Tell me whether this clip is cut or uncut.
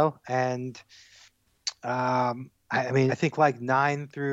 cut